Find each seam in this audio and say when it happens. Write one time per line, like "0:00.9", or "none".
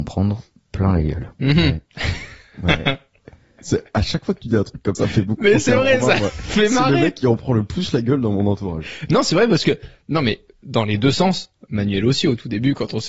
0:04.9